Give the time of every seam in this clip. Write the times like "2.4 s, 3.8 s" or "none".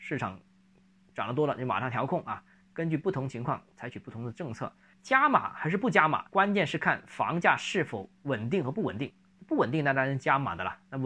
4.9 s, 6.3 s